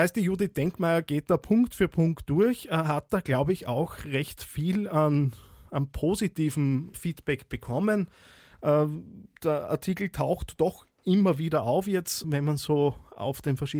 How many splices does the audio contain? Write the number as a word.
two